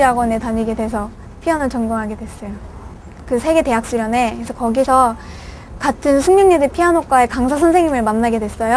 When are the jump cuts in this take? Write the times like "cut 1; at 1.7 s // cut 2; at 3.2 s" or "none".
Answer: none